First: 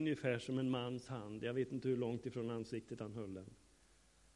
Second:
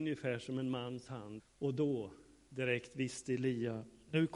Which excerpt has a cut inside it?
second; 1 cut; at 1.4 s

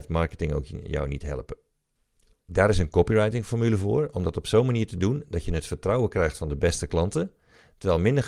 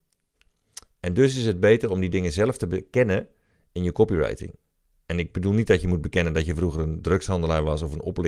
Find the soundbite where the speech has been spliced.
first; 1 cut; at 2.3 s

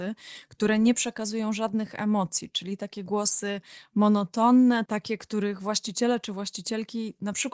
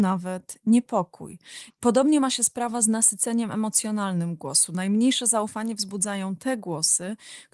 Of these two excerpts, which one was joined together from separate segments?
second; 1 cut; at 1.7 s

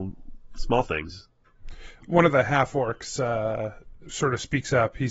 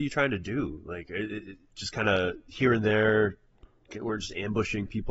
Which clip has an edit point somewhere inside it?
first; 1 cut; at 4.1 s

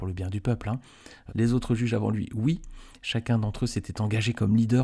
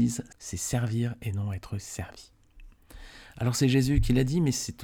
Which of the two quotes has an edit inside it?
first; 1 cut; at 1.3 s

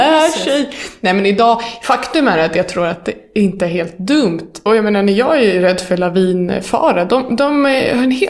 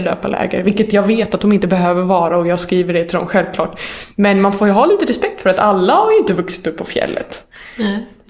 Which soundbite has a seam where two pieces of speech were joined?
first; 1 cut; at 4.7 s

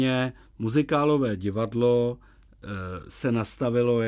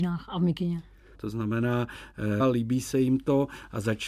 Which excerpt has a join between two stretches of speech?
second; 2 cuts; at 1.1 s, 2.4 s

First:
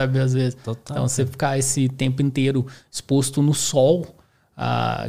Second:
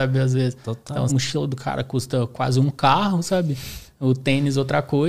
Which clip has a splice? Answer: second; 1 cut; at 1.1 s

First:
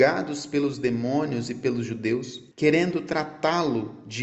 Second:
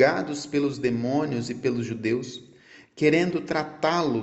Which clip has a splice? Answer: first; 1 cut; at 2.5 s

